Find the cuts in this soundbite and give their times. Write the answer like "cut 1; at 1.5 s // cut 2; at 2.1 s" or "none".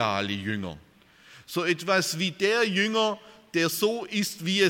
none